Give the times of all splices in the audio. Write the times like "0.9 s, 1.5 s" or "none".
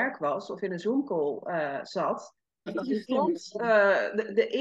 2.7 s